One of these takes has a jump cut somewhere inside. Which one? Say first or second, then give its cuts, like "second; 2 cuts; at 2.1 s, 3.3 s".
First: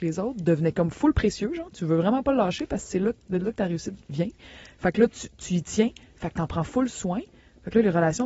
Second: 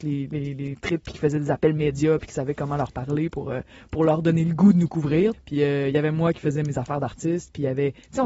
second; 1 cut; at 5.3 s